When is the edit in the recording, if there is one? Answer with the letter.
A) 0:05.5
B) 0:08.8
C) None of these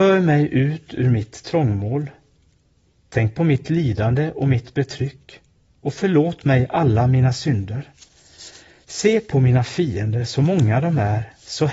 C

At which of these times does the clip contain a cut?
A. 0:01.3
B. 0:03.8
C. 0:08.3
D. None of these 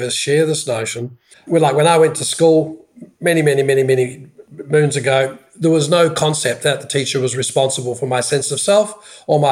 A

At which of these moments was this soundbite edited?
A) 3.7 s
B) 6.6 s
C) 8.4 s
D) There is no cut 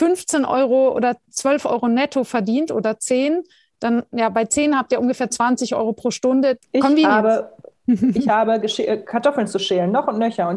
B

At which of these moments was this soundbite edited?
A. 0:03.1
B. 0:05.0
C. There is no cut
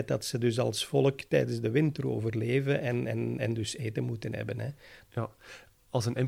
B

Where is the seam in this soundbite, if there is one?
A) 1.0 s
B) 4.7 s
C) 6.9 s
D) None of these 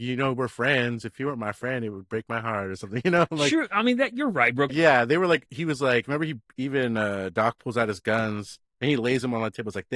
B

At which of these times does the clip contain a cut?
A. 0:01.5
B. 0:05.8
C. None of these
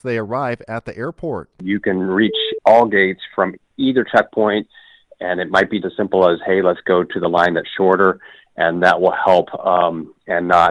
B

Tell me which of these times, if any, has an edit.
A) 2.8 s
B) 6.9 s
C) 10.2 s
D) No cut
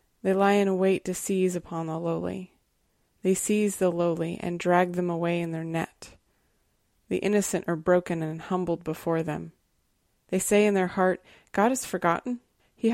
C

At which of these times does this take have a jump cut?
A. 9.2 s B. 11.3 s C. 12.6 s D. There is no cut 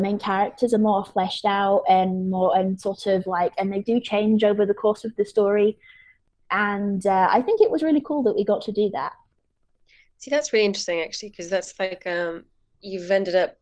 D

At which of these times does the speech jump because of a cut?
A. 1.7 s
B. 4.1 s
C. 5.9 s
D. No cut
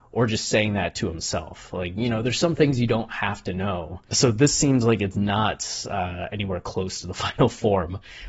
B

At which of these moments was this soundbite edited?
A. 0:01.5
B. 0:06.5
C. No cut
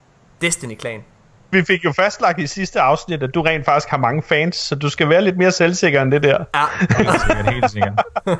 A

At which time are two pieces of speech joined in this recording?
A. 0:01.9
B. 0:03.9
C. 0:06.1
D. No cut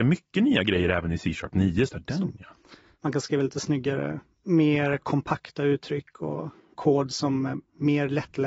A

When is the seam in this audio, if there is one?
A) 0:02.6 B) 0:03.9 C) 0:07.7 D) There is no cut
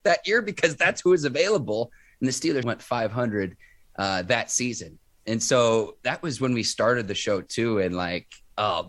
A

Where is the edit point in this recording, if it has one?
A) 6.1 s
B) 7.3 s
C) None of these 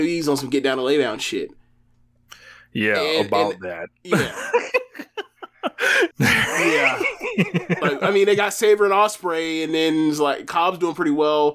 A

